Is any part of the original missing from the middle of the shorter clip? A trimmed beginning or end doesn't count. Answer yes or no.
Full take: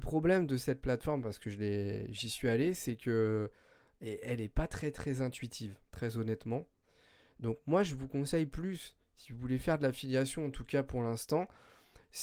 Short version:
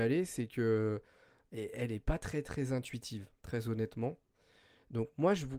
no